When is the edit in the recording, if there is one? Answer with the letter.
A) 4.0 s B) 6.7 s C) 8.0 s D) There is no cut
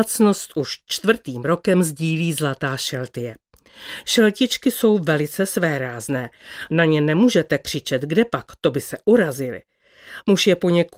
A